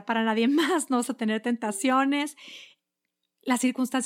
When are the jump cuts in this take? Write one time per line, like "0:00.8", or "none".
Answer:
none